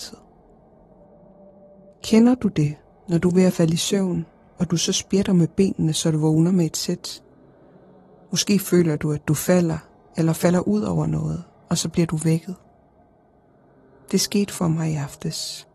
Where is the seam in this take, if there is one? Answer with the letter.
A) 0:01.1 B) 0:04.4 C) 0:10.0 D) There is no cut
D